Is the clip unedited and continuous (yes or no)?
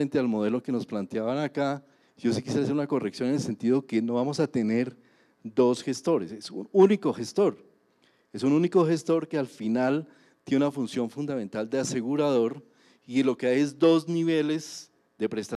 yes